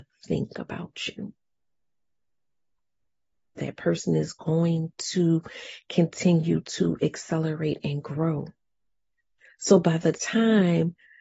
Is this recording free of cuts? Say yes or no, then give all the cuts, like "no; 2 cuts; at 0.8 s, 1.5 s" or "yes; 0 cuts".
no; 1 cut; at 3.6 s